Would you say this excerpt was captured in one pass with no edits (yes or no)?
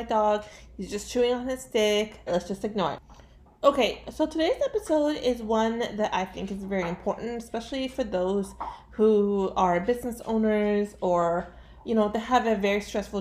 no